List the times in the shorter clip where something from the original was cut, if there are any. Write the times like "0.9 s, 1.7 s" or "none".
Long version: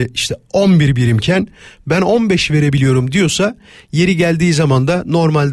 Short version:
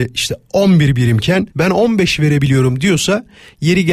1.5 s